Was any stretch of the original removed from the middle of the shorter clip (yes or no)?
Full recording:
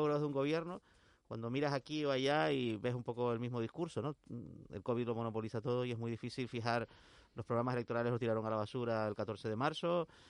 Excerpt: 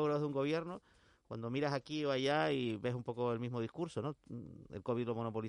no